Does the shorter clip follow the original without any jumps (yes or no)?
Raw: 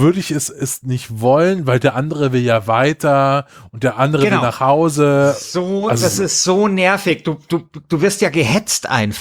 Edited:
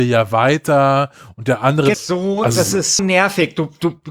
no